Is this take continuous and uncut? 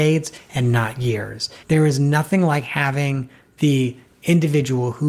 no; 1 cut; at 1.6 s

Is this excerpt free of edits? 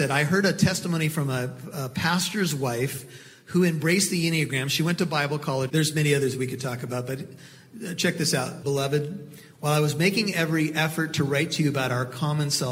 no; 2 cuts; at 5.7 s, 8.6 s

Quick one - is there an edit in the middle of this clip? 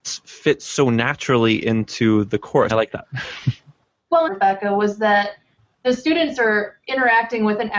yes; 2 cuts; at 2.7 s, 4.3 s

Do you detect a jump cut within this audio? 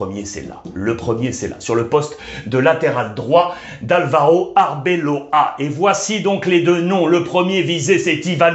no; 0 cuts

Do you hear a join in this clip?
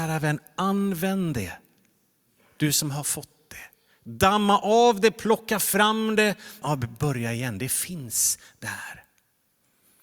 yes; 1 cut; at 6.6 s

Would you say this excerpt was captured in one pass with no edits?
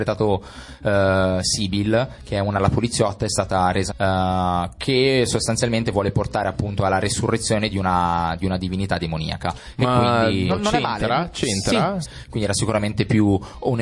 no; 3 cuts; at 3.9 s, 10.5 s, 12.0 s

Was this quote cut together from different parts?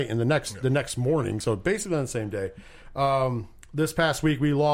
no; 0 cuts

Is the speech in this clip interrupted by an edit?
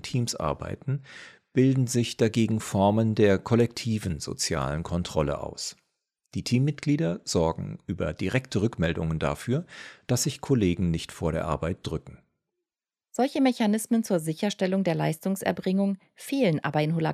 no; 0 cuts

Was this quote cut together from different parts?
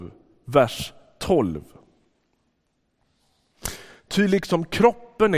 no; 0 cuts

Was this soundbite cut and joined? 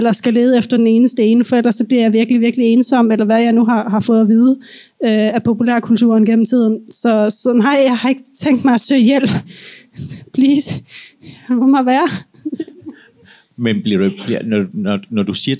no; 0 cuts

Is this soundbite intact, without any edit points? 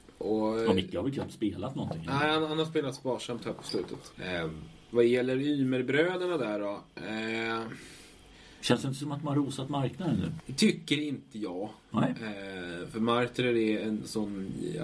no; 2 cuts; at 4.1 s, 10.4 s

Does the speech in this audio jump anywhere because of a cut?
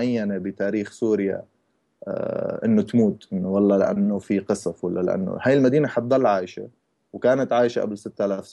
no; 0 cuts

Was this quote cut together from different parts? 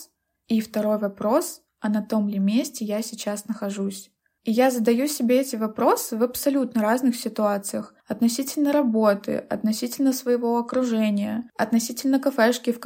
no; 0 cuts

